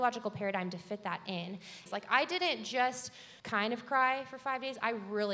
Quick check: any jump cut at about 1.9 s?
yes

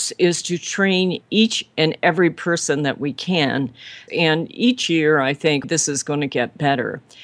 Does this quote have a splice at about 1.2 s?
no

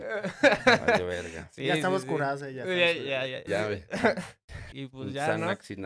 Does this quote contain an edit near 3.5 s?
yes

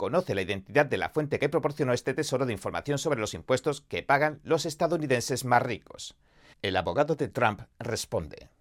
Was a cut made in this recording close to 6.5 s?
yes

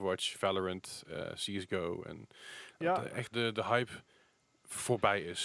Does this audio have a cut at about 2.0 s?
no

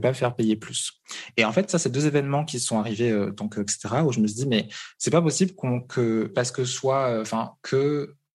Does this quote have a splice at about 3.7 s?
yes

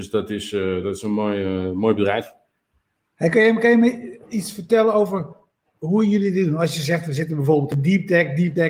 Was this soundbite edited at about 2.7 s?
no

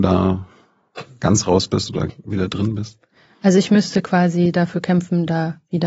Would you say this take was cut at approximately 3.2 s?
no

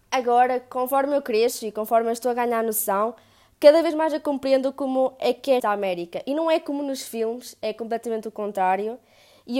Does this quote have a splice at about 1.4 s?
no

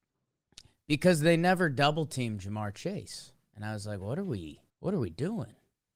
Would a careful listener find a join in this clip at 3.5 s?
no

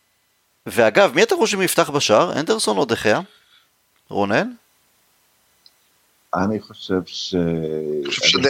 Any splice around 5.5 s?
no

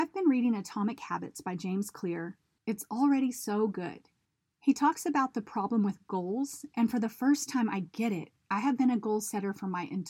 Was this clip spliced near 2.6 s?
yes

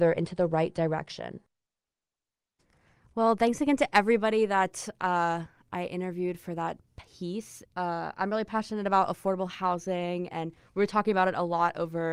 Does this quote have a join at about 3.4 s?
no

